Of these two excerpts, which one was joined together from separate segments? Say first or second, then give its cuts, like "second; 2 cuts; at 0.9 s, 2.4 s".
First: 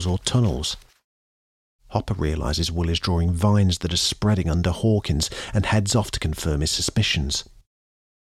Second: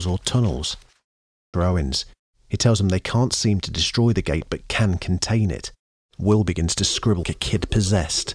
second; 3 cuts; at 1.5 s, 6.1 s, 7.2 s